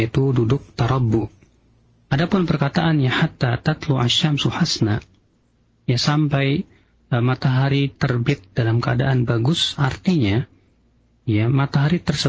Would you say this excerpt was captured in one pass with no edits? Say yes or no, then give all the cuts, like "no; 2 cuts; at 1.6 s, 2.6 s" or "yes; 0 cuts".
no; 1 cut; at 2.0 s